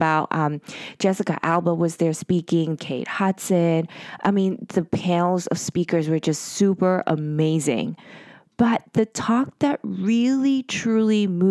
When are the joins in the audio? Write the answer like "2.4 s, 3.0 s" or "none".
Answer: 2.8 s